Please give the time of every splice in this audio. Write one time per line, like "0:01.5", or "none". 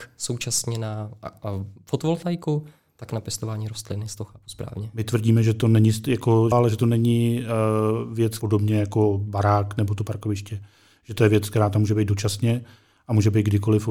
0:06.5
0:08.4